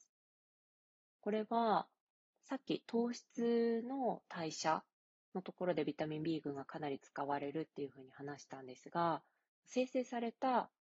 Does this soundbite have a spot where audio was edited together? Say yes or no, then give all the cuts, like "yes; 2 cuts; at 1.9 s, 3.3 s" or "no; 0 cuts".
no; 0 cuts